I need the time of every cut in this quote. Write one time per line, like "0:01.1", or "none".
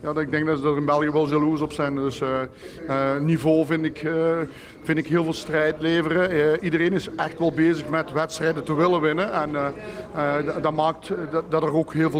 none